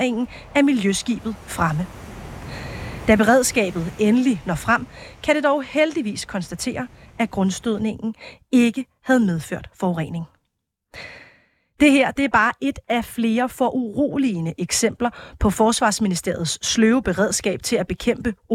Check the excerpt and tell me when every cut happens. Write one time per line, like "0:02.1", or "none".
none